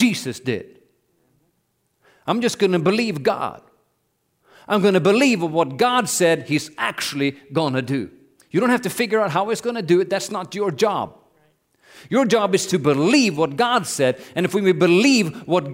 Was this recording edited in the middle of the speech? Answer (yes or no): no